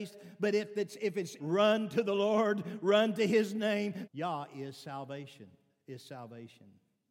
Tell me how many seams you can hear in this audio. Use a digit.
2